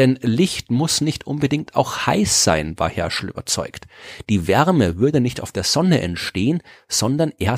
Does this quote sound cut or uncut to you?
uncut